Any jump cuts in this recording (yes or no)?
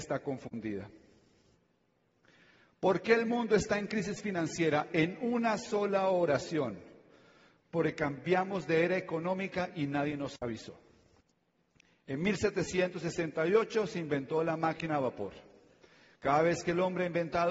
no